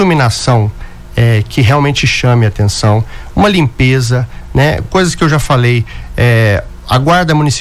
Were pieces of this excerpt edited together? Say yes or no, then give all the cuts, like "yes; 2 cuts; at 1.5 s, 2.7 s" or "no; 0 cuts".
no; 0 cuts